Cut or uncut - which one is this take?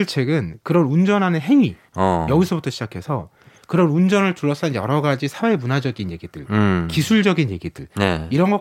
uncut